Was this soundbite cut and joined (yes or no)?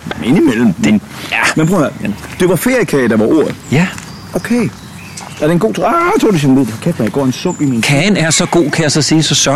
no